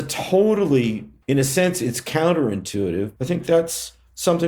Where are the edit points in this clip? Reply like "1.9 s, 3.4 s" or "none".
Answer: 1.2 s, 3.2 s

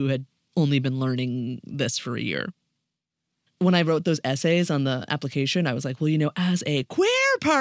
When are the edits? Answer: 3.5 s

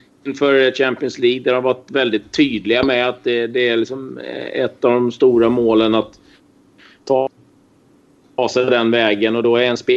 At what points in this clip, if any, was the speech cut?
none

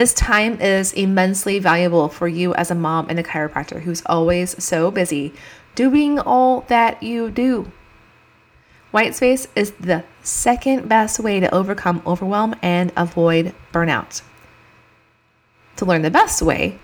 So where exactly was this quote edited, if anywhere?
none

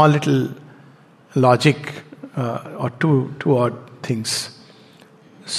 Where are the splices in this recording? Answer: none

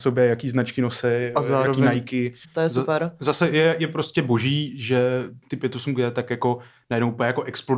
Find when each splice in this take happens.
2.4 s

